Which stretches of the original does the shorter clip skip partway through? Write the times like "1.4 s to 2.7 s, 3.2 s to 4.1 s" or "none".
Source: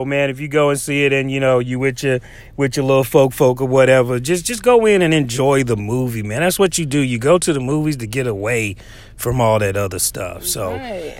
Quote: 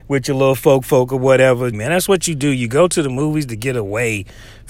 4.2 s to 6.2 s